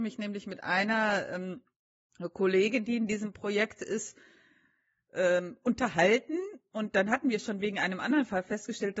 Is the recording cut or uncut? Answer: uncut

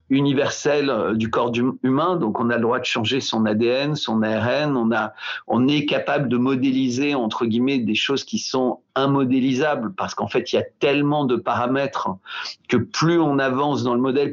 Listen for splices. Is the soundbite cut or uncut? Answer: uncut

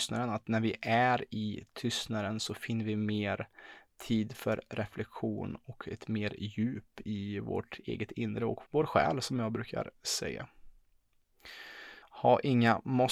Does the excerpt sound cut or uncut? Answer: cut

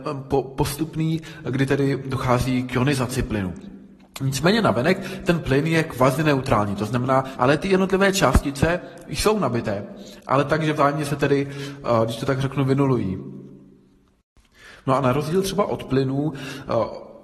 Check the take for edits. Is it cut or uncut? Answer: cut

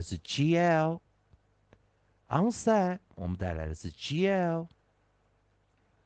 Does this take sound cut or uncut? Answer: uncut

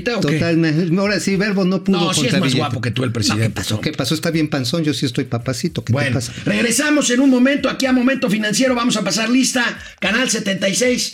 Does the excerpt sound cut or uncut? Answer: uncut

